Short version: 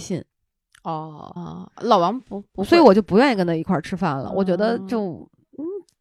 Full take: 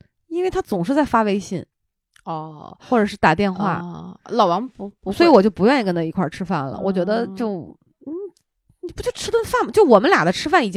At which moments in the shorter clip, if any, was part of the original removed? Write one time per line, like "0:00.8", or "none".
0:01.4